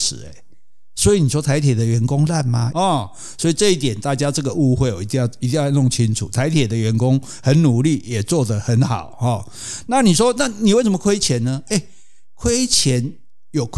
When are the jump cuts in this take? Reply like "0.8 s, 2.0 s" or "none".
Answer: 2.7 s